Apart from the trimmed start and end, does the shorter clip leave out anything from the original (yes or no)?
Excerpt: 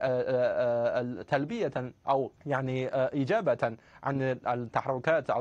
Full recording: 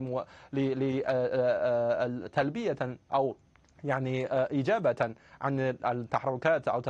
yes